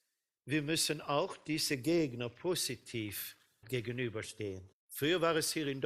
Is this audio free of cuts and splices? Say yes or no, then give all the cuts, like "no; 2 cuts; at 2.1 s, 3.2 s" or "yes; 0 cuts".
no; 2 cuts; at 3.6 s, 4.7 s